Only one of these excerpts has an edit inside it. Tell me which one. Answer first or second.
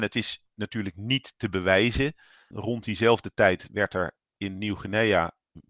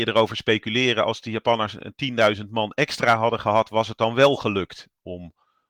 first